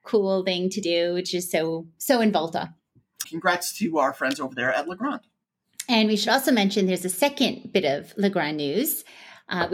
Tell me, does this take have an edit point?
yes; 1 cut; at 3.2 s

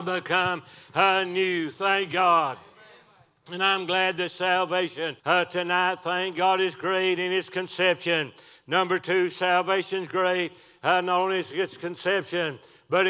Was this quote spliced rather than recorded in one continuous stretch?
yes; 1 cut; at 5.2 s

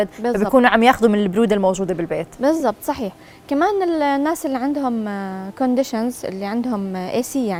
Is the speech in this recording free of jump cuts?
yes; 0 cuts

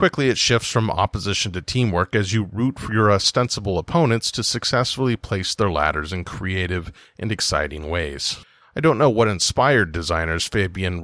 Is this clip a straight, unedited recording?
no; 1 cut; at 8.6 s

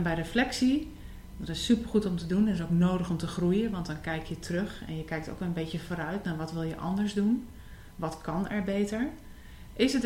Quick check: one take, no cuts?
yes; 0 cuts

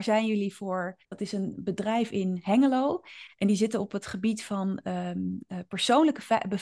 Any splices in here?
yes; 1 cut; at 1.0 s

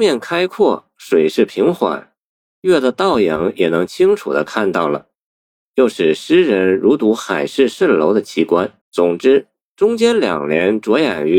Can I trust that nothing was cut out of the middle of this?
no; 2 cuts; at 5.7 s, 8.8 s

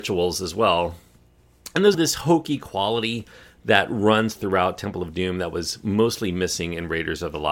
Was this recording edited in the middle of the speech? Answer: yes; 1 cut; at 1.9 s

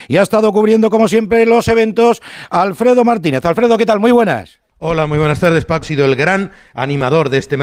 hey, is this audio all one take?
no; 2 cuts; at 4.7 s, 5.8 s

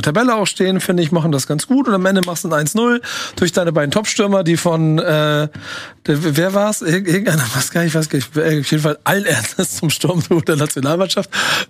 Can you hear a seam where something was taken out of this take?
no; 0 cuts

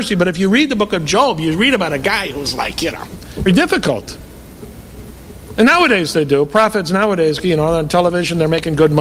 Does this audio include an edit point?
yes; 2 cuts; at 3.5 s, 5.5 s

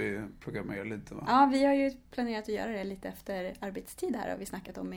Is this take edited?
no; 0 cuts

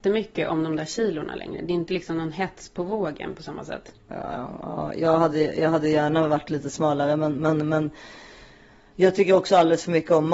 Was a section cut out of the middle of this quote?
no; 0 cuts

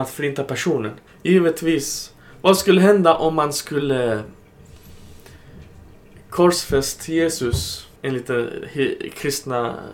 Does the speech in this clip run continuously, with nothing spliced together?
no; 2 cuts; at 1.1 s, 8.0 s

